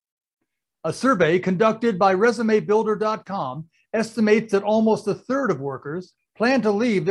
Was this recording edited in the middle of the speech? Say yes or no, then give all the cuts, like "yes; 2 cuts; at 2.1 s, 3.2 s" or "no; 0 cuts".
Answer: yes; 1 cut; at 6.2 s